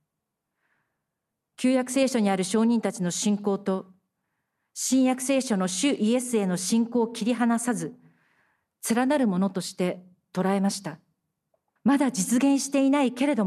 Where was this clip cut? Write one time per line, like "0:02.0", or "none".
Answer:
0:11.8

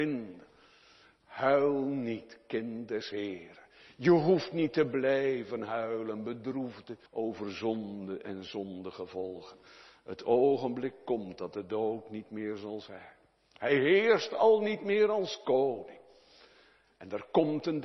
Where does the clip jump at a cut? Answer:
0:07.1

